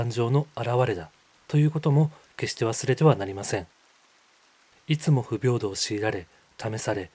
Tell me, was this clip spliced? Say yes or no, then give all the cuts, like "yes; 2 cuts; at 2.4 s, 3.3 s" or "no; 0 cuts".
no; 0 cuts